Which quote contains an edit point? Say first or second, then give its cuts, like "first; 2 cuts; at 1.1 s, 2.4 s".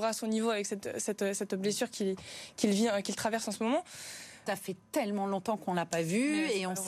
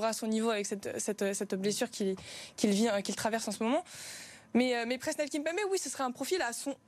first; 1 cut; at 4.5 s